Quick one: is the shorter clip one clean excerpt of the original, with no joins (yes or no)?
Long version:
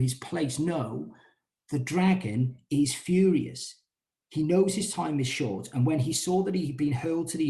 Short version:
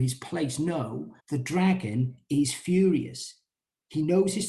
no